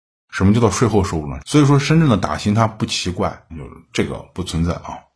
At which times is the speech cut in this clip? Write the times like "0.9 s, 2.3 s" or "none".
1.4 s, 3.5 s